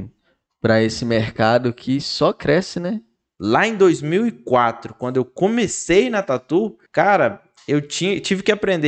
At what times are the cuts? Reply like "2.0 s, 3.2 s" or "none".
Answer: 3.2 s, 6.9 s